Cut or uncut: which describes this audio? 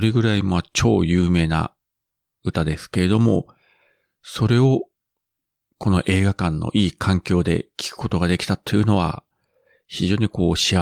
uncut